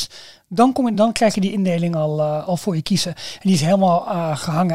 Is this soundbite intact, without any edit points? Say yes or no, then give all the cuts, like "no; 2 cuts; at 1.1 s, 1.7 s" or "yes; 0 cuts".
yes; 0 cuts